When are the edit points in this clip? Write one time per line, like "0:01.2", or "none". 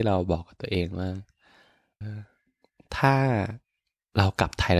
0:02.0